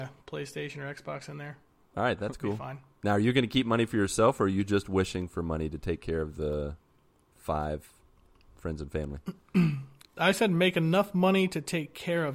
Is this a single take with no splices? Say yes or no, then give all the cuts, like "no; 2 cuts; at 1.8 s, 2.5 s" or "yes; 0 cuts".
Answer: yes; 0 cuts